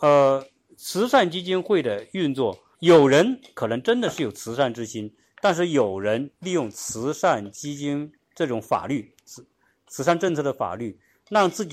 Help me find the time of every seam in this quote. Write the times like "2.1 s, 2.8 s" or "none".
2.7 s, 5.2 s